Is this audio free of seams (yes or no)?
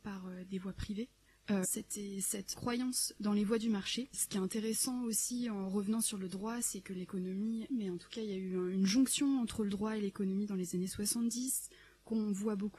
no